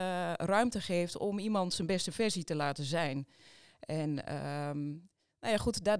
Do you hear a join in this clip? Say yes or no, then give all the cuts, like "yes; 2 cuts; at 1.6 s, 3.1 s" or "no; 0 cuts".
no; 0 cuts